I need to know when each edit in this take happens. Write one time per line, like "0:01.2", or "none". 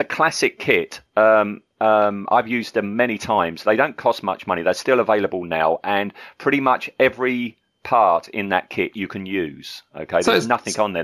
none

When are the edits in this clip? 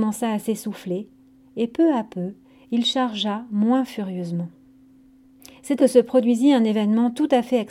0:05.8

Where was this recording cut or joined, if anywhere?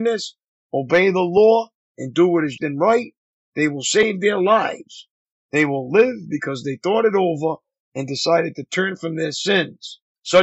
0:02.6

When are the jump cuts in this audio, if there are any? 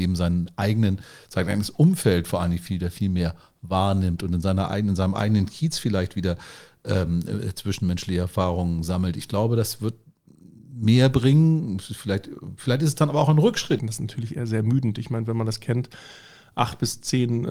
0:10.6
0:13.8

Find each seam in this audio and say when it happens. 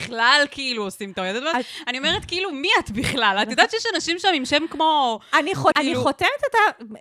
0:05.7

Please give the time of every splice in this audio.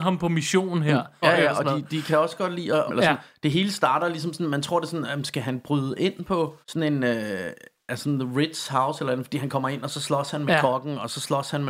0:01.2
0:02.9
0:06.6

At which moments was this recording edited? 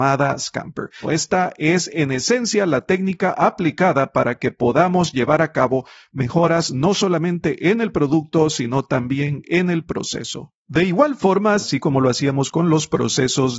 0:01.0
0:11.6

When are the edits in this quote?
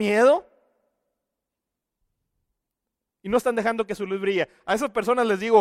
none

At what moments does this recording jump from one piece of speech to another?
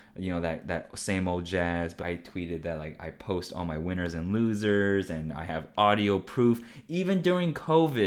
0:02.0

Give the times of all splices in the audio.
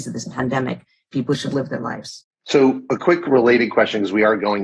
none

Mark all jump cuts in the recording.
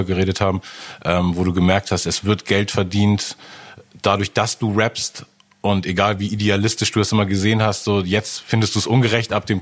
none

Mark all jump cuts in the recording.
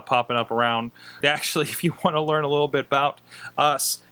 0:01.2

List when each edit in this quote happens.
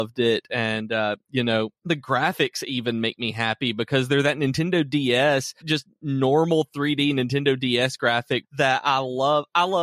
0:01.8
0:05.6
0:08.4

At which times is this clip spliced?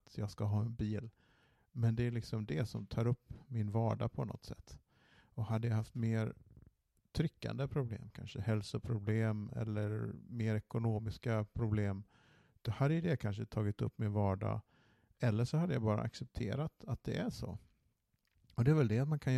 none

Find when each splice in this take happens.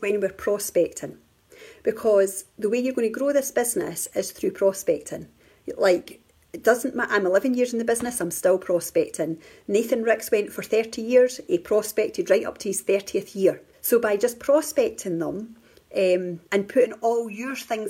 0:13.7
0:16.4

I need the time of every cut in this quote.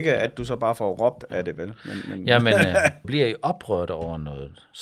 0:03.0

